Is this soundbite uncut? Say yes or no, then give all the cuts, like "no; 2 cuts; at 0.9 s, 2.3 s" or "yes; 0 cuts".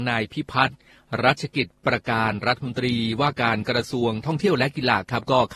yes; 0 cuts